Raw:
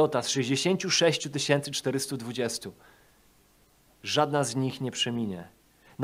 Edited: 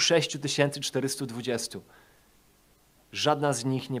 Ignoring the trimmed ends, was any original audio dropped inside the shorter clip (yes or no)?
no